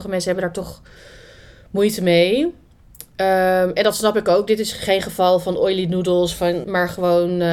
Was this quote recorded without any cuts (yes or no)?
no